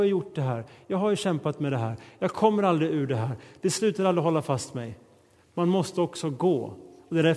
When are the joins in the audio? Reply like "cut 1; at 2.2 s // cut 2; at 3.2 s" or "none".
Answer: none

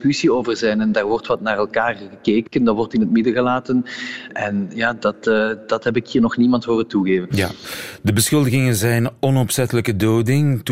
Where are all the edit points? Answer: cut 1; at 4.3 s

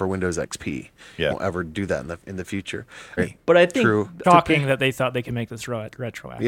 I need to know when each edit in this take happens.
cut 1; at 1.3 s // cut 2; at 3.2 s // cut 3; at 4.2 s

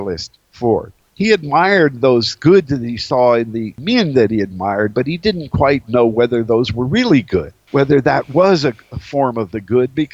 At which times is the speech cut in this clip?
cut 1; at 1.0 s

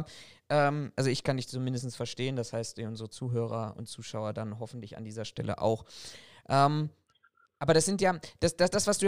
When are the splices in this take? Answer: none

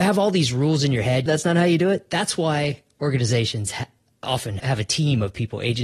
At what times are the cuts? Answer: cut 1; at 1.3 s // cut 2; at 4.6 s

